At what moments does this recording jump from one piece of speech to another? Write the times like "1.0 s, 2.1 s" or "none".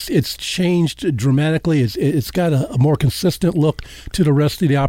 2.7 s